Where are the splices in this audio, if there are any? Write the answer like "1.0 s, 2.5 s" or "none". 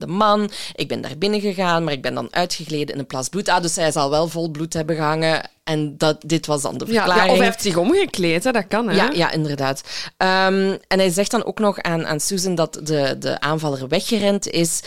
none